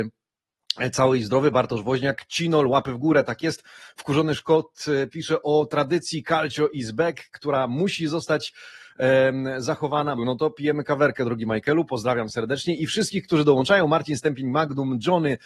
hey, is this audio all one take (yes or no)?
no